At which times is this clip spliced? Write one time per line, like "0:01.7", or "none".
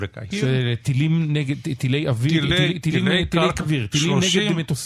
0:03.6